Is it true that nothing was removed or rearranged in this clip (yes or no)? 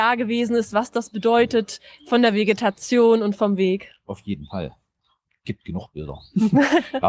yes